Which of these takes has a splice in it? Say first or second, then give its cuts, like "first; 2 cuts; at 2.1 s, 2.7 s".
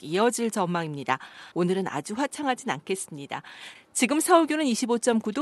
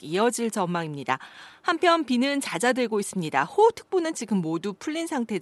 first; 2 cuts; at 1.5 s, 3.8 s